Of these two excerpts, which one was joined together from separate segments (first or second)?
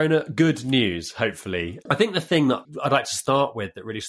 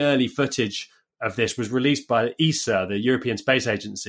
first